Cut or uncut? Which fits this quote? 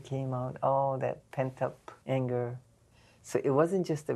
uncut